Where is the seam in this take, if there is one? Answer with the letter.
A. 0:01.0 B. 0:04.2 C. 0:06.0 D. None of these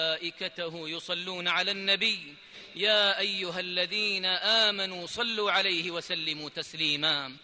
D